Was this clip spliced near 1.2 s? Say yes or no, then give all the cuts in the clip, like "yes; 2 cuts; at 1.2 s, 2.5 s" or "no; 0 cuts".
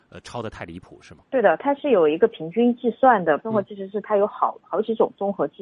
yes; 2 cuts; at 1.2 s, 3.4 s